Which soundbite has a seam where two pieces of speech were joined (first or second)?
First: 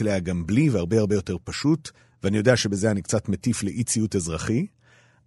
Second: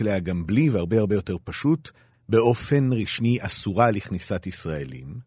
second